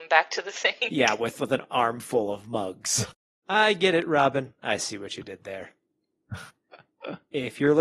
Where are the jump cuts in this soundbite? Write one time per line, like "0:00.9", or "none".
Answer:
0:03.4